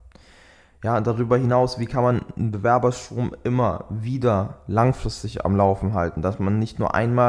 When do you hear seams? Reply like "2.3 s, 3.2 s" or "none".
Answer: none